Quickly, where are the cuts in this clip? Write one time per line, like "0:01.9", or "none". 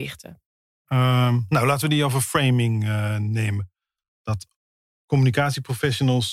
none